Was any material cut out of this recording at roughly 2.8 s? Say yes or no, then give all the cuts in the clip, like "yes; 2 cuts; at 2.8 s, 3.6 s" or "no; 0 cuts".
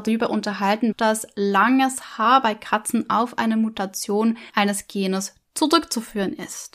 no; 2 cuts; at 0.9 s, 4.5 s